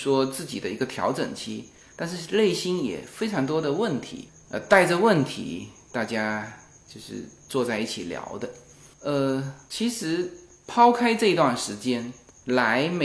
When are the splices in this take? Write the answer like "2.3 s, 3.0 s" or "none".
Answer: 8.9 s